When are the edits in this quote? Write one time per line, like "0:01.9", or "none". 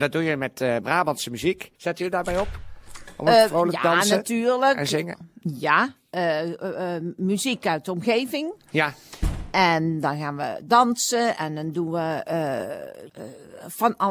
0:01.8
0:13.1